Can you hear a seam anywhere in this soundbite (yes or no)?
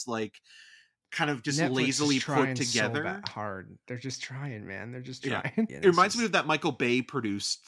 yes